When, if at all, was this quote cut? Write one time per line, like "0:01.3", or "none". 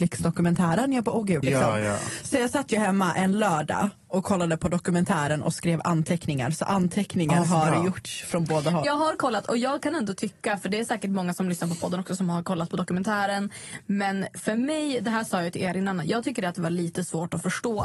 0:01.4
0:08.8

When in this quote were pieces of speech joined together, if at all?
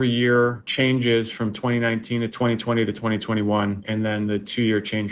0:02.3

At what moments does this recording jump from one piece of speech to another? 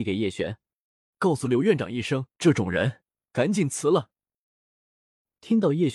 0:01.1
0:02.3

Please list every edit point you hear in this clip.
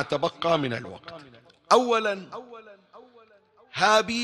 none

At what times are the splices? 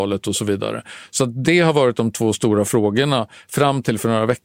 none

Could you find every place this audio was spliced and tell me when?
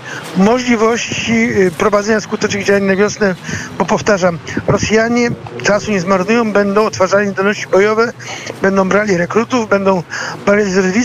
none

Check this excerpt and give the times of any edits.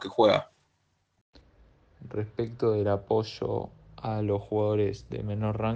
none

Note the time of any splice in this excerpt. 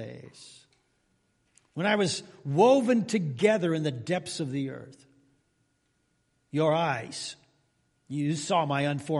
none

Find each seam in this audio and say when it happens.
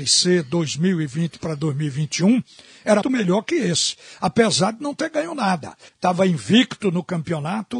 0:03.0
0:05.9

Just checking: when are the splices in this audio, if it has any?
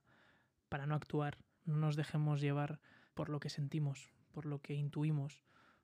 0:01.6

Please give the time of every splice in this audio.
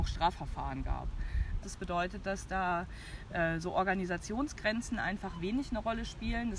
0:01.6

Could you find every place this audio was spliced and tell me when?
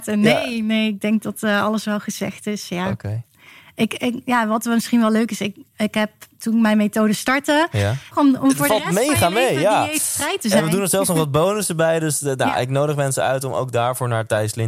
0:08.1

